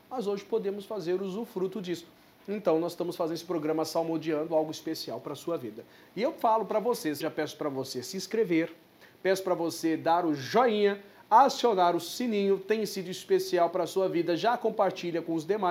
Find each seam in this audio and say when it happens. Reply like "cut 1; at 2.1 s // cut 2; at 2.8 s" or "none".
cut 1; at 7.2 s